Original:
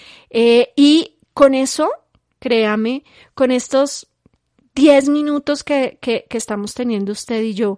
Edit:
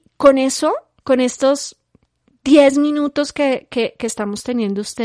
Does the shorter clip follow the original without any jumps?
no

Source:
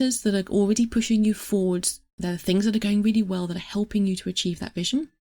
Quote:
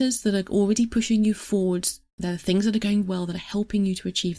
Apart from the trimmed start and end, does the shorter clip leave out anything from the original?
yes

